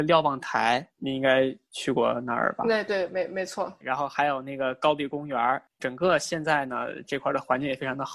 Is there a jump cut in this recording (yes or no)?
no